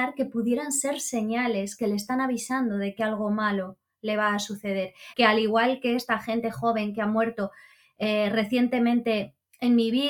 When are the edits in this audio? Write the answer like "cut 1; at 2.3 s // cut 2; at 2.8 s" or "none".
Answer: cut 1; at 5.1 s